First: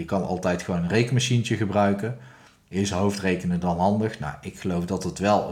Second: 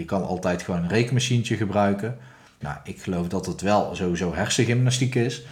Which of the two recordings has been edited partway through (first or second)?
second